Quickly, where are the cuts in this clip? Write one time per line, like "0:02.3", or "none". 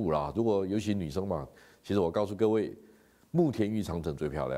0:01.7